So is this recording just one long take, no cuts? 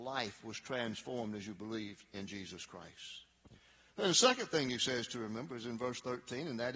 yes; 0 cuts

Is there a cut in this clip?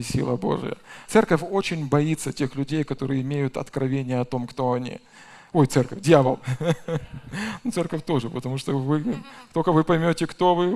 yes; 1 cut; at 1.0 s

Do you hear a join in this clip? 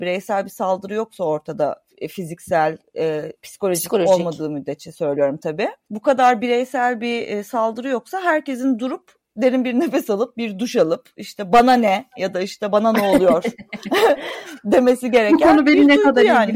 yes; 1 cut; at 3.4 s

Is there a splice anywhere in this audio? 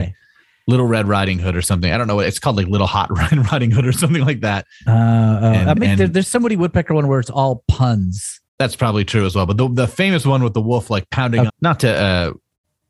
yes; 2 cuts; at 8.5 s, 11.5 s

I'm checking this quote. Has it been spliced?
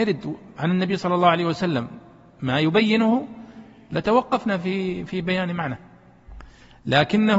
no; 0 cuts

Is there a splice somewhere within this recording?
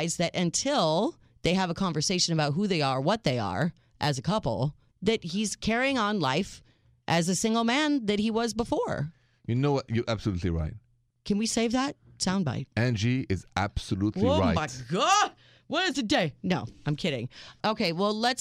no; 0 cuts

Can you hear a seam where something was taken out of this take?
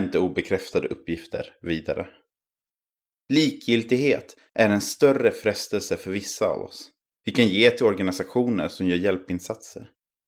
yes; 2 cuts; at 3.1 s, 7.1 s

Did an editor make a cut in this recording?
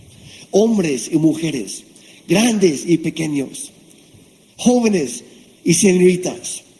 no; 0 cuts

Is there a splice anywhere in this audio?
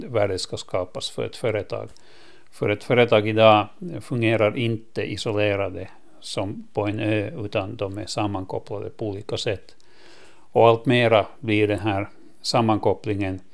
no; 0 cuts

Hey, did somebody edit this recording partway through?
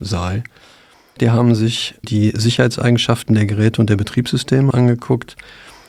yes; 2 cuts; at 1.2 s, 4.7 s

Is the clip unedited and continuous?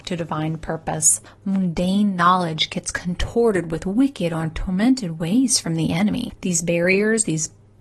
no; 2 cuts; at 1.3 s, 6.4 s

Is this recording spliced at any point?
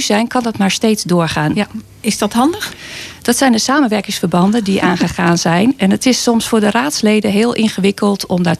yes; 1 cut; at 1.5 s

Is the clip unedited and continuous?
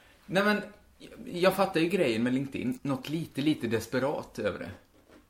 no; 1 cut; at 2.8 s

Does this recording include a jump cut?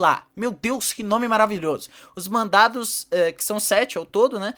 no; 0 cuts

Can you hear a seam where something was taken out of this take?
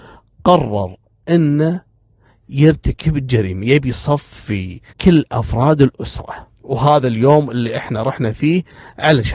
yes; 2 cuts; at 4.9 s, 6.6 s

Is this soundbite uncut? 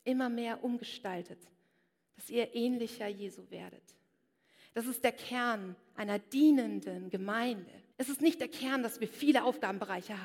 no; 1 cut; at 7.9 s

